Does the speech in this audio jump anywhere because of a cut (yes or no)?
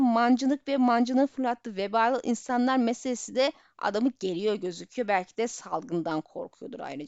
no